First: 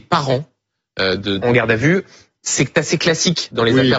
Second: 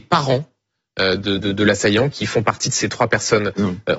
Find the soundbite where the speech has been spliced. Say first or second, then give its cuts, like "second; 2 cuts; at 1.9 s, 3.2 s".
first; 1 cut; at 1.4 s